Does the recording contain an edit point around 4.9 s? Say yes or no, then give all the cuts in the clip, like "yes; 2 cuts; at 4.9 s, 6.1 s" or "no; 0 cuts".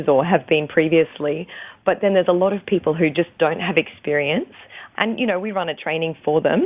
yes; 1 cut; at 4.9 s